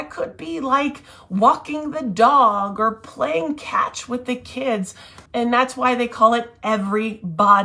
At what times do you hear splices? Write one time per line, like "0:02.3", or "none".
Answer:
0:05.3

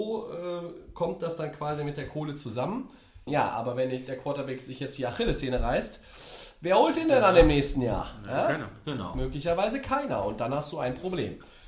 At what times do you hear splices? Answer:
0:03.3

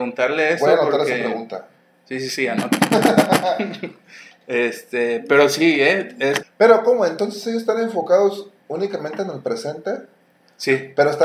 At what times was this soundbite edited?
0:06.4

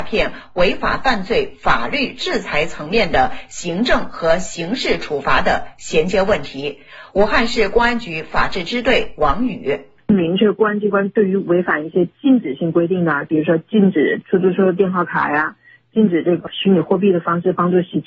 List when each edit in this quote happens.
none

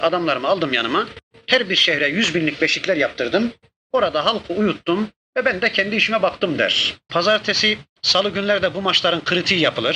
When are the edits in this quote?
0:07.1

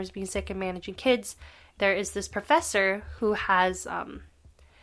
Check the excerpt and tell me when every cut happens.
0:01.8

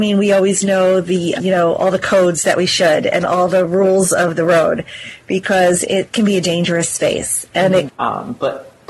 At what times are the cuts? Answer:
0:01.4
0:07.9

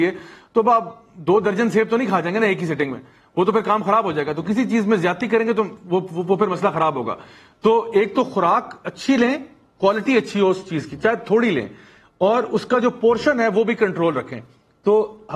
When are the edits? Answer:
none

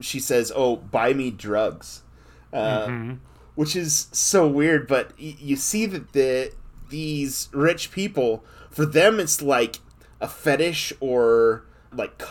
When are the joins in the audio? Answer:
none

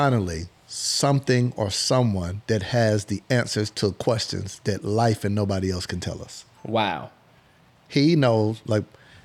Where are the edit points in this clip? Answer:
0:03.7

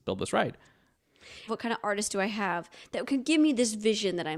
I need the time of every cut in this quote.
0:01.5

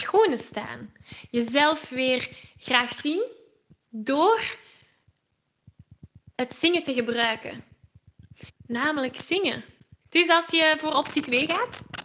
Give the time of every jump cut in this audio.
0:08.5
0:10.0

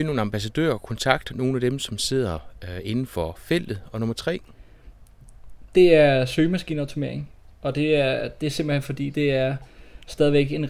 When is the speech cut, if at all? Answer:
none

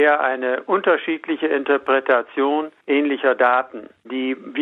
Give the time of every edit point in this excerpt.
0:02.8

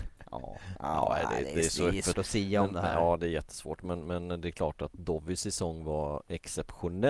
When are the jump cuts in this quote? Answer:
0:02.1

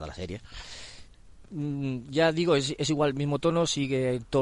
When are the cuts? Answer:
none

